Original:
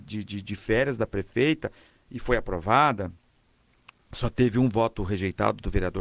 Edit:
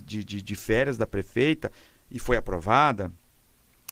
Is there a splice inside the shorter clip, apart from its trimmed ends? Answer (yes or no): no